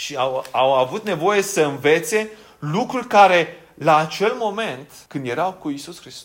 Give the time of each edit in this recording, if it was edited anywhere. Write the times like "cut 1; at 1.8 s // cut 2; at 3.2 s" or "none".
cut 1; at 5.1 s